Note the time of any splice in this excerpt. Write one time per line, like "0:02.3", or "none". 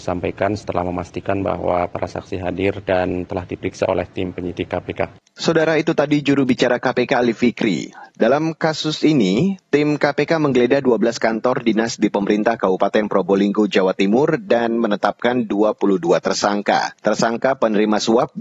0:17.0